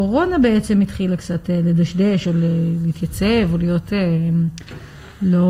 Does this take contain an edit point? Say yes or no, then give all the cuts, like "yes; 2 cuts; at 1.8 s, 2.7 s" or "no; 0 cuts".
no; 0 cuts